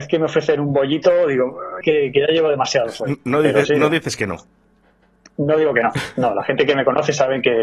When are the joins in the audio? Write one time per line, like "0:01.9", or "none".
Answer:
0:01.8